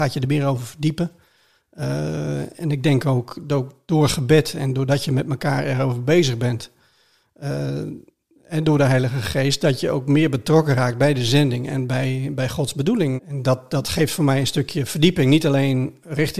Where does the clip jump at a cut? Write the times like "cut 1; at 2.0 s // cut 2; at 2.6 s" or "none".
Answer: cut 1; at 13.2 s